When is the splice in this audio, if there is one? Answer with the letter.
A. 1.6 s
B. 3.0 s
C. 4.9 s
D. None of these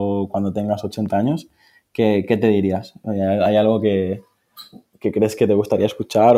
C